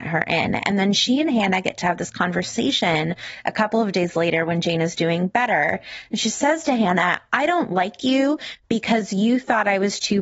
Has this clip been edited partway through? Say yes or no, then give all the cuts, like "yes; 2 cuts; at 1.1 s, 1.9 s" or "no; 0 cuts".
no; 0 cuts